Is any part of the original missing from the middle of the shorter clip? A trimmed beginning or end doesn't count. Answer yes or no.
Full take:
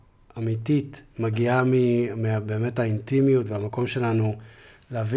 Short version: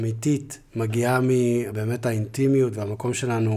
yes